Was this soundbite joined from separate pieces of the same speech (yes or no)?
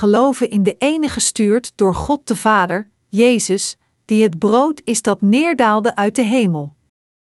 no